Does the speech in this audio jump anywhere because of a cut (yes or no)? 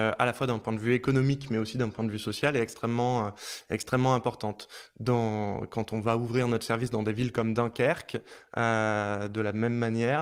no